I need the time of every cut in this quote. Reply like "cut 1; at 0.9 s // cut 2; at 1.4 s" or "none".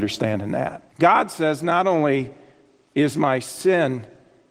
cut 1; at 0.9 s

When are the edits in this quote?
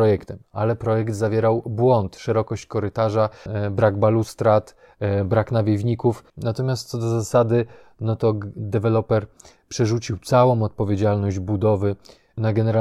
cut 1; at 3.5 s // cut 2; at 6.3 s

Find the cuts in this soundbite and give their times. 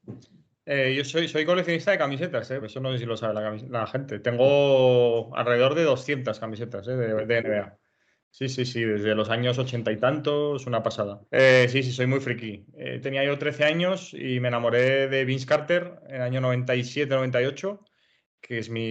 cut 1; at 2.6 s // cut 2; at 11.3 s // cut 3; at 13.0 s

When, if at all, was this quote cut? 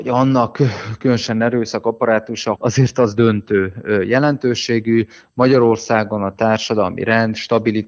cut 1; at 2.5 s

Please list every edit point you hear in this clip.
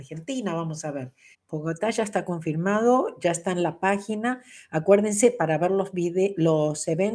cut 1; at 1.3 s

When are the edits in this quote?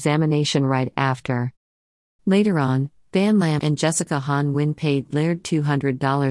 cut 1; at 2.2 s // cut 2; at 3.6 s

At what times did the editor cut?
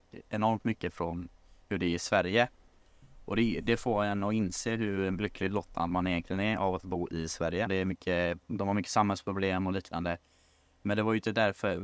cut 1; at 7.7 s

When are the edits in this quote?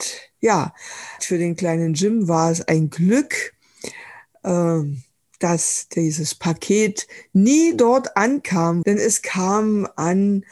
cut 1; at 1.2 s // cut 2; at 8.8 s

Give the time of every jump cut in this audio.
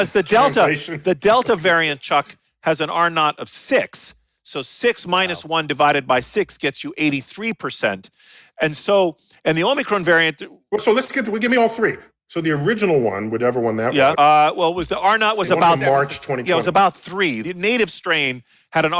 cut 1; at 14.1 s

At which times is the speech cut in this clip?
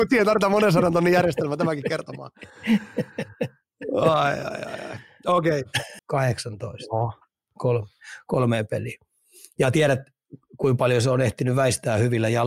cut 1; at 6.0 s

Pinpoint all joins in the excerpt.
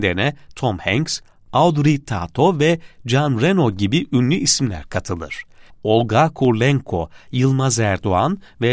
cut 1; at 5.7 s

